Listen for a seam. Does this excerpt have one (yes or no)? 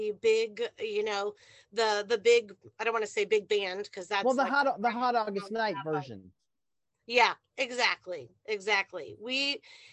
no